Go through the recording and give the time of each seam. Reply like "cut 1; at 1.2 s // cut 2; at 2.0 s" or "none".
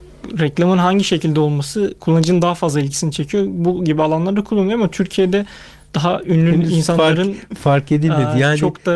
none